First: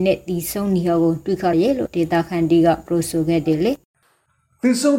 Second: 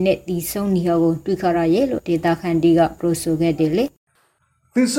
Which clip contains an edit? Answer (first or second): first